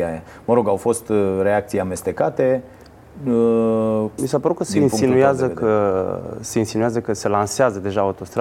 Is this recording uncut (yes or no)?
no